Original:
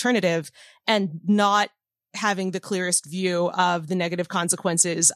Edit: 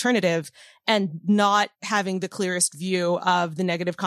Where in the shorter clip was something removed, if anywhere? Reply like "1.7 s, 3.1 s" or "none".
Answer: 1.7 s